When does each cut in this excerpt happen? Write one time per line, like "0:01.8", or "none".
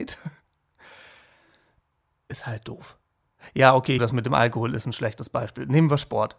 0:04.0